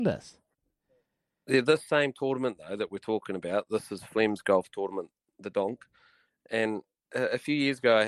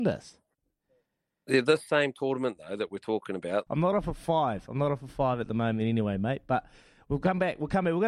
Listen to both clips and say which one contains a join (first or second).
second